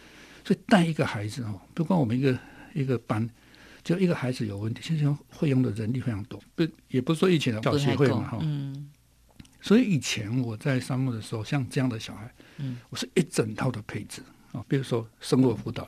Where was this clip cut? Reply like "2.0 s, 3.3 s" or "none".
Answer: 6.4 s, 7.6 s, 14.6 s